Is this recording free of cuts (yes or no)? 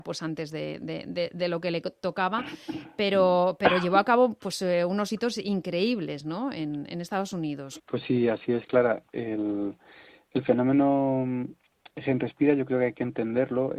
no